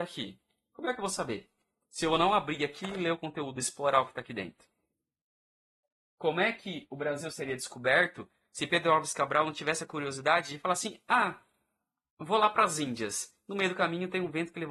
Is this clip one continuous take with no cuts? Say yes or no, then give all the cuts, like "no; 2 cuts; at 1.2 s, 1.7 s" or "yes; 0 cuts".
yes; 0 cuts